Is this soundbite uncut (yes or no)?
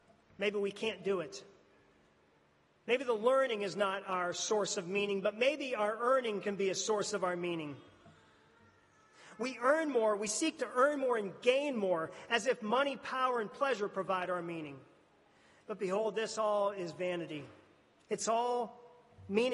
no